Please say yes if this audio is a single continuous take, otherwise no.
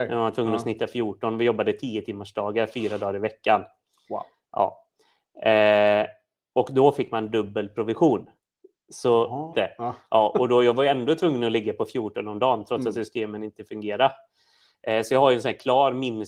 no